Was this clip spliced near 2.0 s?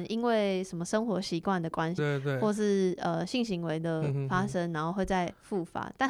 yes; 1 cut; at 2.0 s

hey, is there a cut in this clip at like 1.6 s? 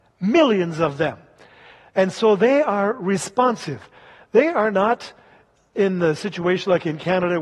no; 0 cuts

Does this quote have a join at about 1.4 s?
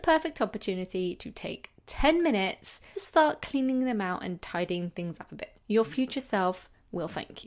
no; 2 cuts; at 2.9 s, 5.6 s

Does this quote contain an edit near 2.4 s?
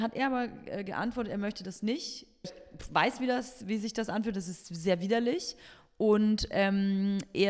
yes; 1 cut; at 2.4 s

